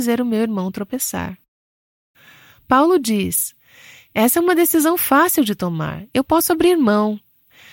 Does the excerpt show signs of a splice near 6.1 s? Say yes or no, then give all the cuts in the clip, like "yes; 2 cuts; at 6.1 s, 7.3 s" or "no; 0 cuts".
no; 0 cuts